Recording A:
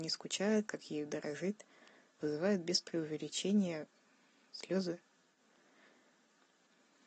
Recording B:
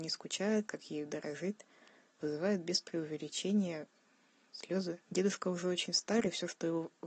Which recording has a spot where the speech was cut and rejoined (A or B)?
B